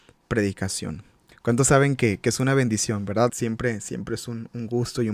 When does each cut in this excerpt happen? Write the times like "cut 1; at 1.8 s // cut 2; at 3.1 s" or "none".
cut 1; at 1.3 s // cut 2; at 3.3 s